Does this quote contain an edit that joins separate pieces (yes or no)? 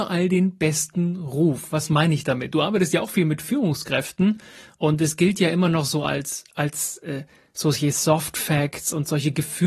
no